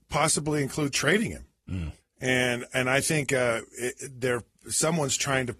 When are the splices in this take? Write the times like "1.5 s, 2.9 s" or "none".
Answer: 2.0 s